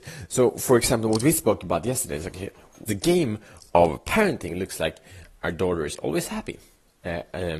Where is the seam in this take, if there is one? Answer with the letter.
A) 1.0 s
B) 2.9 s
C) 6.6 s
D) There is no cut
B